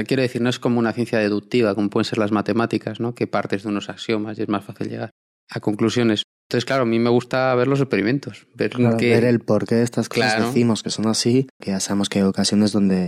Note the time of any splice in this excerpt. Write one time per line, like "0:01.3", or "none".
0:11.6